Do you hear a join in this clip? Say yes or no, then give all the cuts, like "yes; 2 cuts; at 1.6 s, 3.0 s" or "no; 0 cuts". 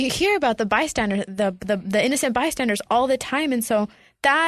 no; 0 cuts